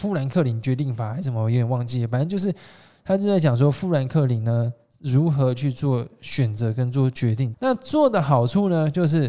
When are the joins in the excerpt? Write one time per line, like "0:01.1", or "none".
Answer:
0:07.5